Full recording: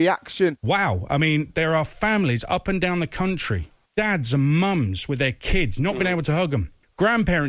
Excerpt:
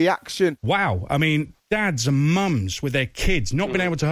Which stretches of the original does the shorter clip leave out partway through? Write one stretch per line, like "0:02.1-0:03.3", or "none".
0:01.5-0:03.8